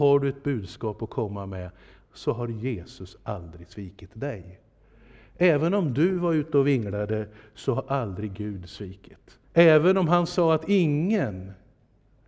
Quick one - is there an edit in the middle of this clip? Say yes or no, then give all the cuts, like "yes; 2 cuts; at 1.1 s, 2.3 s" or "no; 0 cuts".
yes; 2 cuts; at 2.0 s, 9.4 s